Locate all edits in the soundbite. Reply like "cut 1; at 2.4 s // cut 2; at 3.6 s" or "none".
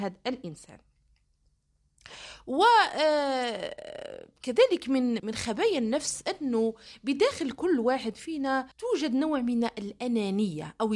cut 1; at 5.2 s // cut 2; at 8.7 s